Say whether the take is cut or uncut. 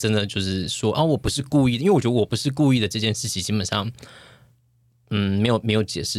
uncut